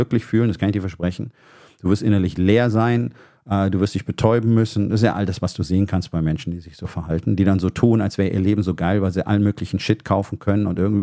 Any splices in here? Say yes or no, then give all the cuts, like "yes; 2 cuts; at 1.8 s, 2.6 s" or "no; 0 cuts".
no; 0 cuts